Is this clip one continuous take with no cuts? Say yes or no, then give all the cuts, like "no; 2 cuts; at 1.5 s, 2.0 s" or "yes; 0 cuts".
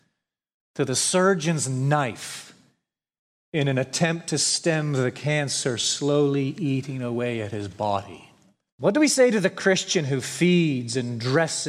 no; 1 cut; at 8.7 s